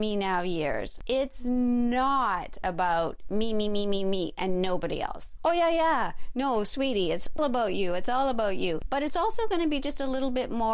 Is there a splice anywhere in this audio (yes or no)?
yes